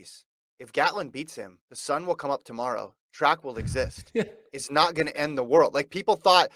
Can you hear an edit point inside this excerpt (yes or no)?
yes